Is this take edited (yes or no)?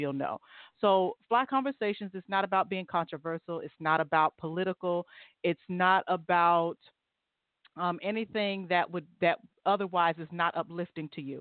no